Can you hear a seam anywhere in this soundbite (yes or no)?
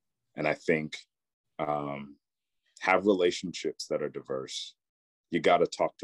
no